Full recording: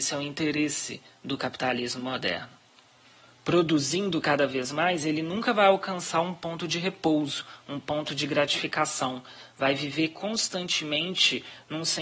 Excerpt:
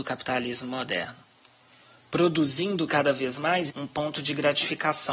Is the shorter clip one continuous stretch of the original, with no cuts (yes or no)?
no